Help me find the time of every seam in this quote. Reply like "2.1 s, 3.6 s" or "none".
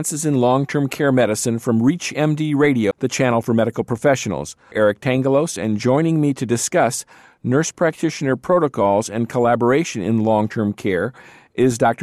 4.7 s